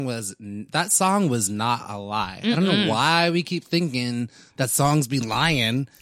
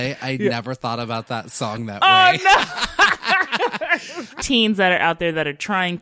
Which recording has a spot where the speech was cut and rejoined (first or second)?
second